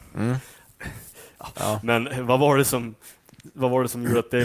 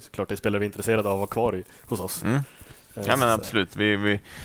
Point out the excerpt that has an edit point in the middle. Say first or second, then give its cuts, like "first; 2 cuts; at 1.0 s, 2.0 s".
first; 1 cut; at 1.5 s